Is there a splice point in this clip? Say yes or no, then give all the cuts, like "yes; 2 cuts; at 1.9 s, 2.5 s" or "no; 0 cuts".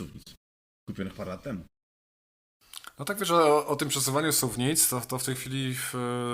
no; 0 cuts